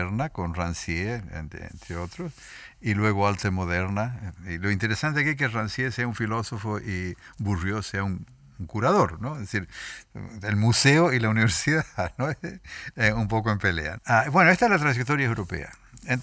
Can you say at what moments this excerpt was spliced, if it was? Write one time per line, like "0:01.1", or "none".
0:14.0